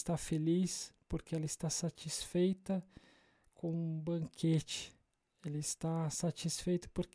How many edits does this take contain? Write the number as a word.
zero